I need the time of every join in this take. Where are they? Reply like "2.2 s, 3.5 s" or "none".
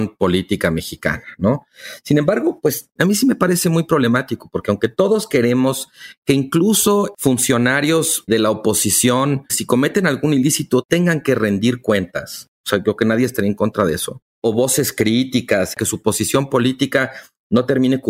8.3 s, 9.5 s, 15.7 s